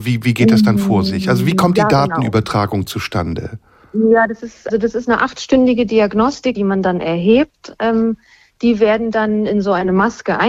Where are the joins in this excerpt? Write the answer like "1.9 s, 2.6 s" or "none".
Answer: 4.7 s, 6.5 s